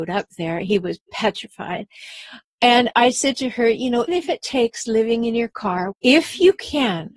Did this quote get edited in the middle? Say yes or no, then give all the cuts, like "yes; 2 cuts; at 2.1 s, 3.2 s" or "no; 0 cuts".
yes; 2 cuts; at 4.1 s, 5.9 s